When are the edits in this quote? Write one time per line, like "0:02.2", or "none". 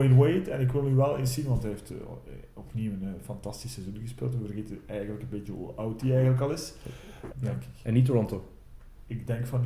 0:07.3

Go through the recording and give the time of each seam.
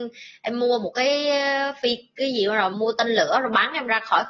0:02.7

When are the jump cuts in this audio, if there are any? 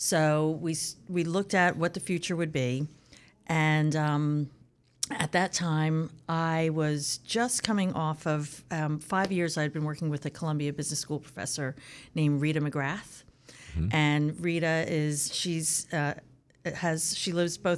none

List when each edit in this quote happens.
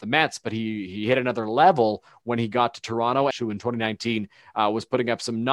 0:03.3

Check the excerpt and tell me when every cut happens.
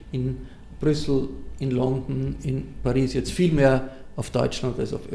none

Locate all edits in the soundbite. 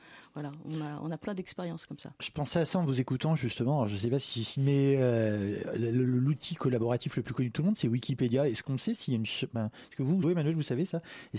0:04.5
0:10.2

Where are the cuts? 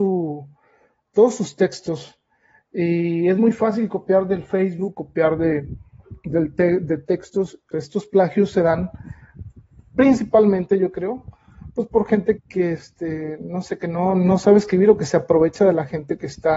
0:07.7
0:12.4

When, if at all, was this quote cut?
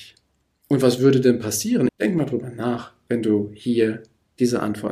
0:01.9

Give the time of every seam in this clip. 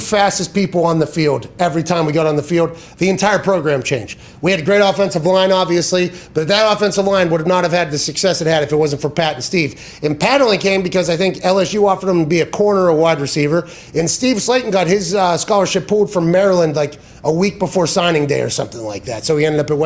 none

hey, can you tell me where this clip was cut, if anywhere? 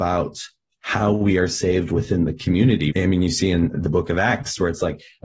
0:02.9

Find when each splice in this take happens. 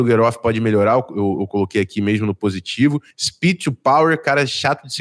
0:03.1

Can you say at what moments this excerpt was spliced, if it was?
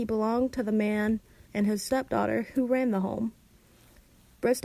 0:01.5

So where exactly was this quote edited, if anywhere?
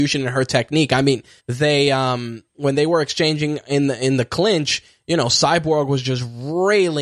0:01.4

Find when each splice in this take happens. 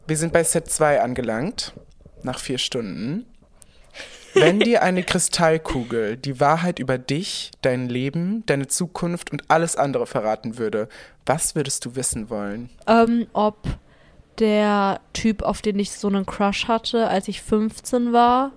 0:13.3

